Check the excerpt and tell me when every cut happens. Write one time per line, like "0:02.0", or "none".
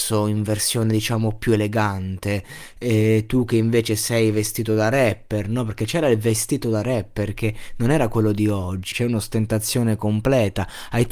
0:08.9